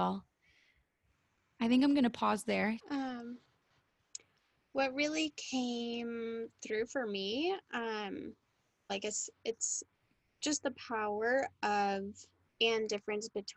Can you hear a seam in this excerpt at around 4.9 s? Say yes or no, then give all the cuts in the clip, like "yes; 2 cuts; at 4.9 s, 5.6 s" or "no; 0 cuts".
no; 2 cuts; at 2.8 s, 8.9 s